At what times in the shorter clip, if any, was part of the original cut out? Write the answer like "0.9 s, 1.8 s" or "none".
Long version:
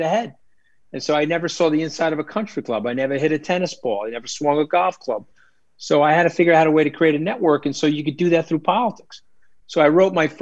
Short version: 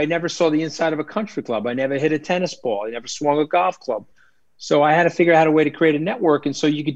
none